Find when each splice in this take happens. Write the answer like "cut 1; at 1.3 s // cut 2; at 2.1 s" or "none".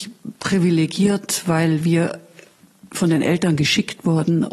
none